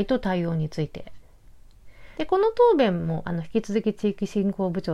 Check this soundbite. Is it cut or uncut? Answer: cut